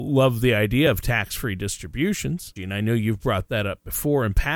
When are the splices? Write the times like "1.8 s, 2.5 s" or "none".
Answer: 2.6 s